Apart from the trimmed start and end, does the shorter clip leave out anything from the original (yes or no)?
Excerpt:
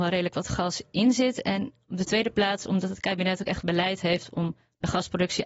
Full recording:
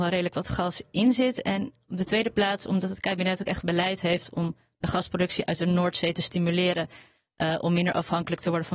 no